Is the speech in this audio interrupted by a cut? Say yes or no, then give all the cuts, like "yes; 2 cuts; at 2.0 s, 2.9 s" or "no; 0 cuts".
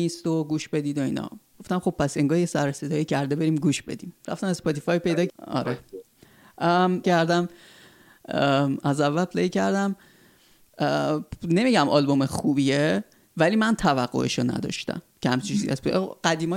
yes; 3 cuts; at 5.3 s, 7.0 s, 15.1 s